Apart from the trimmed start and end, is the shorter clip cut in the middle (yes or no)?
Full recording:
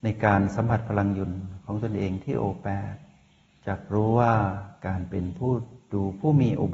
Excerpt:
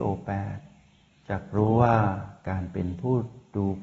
no